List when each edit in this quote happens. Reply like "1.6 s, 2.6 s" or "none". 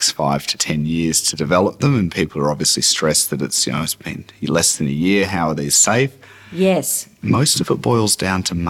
none

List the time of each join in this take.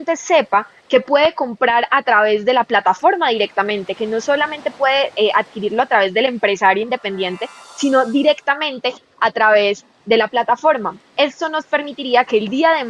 none

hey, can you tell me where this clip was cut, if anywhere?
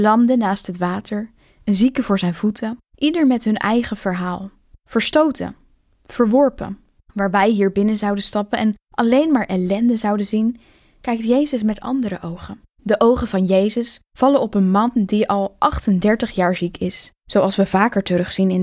none

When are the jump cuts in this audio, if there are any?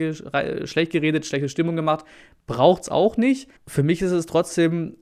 3.6 s

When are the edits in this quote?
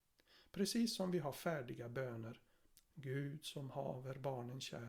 2.8 s

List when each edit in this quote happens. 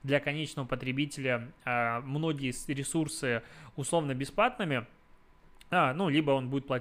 none

